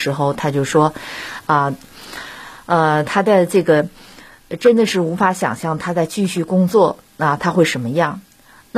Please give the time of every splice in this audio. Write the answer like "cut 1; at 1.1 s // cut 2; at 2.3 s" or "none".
none

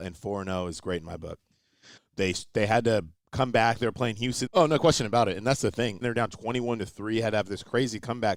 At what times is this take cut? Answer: cut 1; at 2.0 s // cut 2; at 4.5 s // cut 3; at 6.0 s

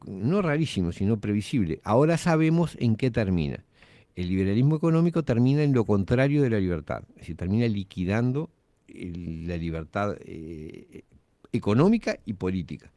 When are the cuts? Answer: none

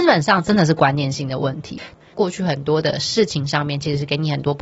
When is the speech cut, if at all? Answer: cut 1; at 2.0 s

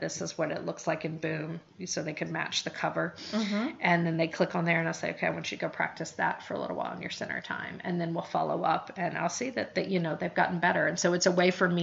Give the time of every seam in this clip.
none

